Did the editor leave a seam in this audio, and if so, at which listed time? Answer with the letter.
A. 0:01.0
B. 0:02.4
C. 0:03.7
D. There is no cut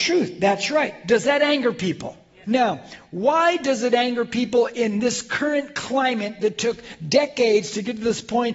B